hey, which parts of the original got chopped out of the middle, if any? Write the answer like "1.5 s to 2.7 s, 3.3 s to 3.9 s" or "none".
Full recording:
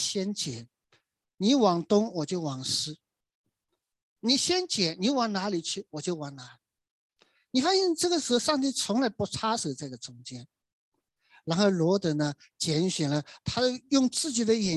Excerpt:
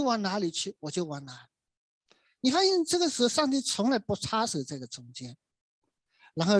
none